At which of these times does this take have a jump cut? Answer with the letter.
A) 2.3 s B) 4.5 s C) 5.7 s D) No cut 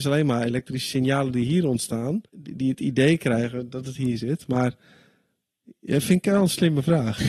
A